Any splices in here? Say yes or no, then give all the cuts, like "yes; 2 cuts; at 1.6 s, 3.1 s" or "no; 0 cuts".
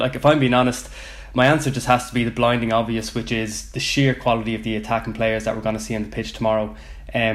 no; 0 cuts